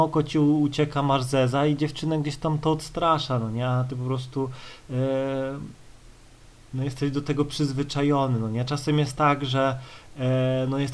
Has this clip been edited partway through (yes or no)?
no